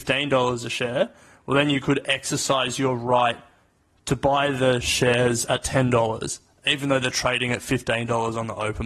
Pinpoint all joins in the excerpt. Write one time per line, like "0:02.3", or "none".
none